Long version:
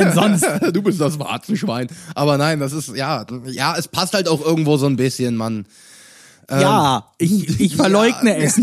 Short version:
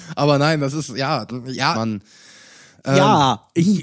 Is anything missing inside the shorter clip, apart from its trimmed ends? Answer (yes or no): yes